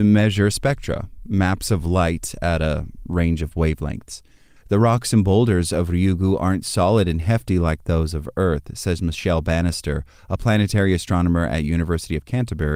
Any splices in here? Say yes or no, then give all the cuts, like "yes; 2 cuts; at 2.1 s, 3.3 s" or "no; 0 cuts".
yes; 1 cut; at 4.6 s